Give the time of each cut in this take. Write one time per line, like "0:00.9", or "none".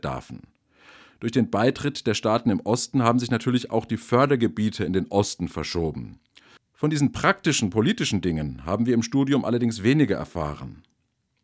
0:06.6